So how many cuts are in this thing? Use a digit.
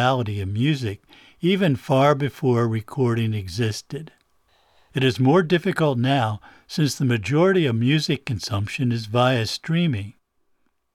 0